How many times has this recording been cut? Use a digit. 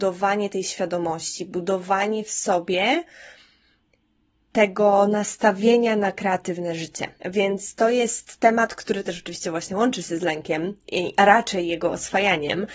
2